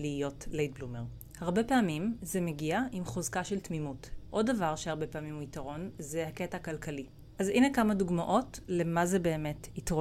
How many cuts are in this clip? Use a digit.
2